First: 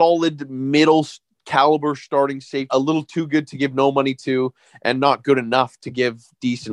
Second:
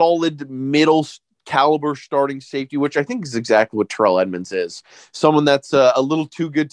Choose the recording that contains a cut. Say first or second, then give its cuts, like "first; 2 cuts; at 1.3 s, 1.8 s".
first; 1 cut; at 2.7 s